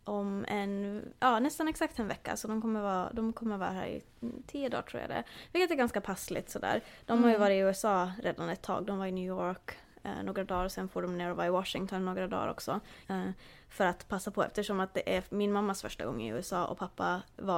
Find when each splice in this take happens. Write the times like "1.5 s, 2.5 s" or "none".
13.0 s